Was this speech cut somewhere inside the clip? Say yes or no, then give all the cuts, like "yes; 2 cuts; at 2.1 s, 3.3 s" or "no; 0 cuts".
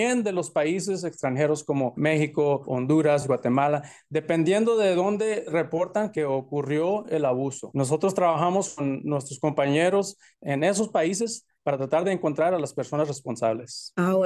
no; 0 cuts